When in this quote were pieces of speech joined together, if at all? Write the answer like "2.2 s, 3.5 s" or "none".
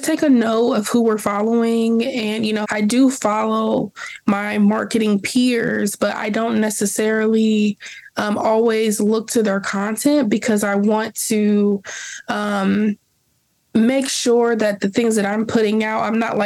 2.6 s